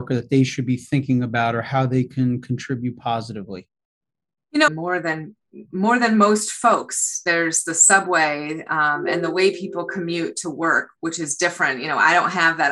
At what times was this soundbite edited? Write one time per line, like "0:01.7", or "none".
0:04.7